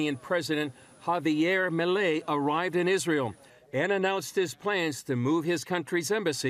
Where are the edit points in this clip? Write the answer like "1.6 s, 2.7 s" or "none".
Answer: 3.7 s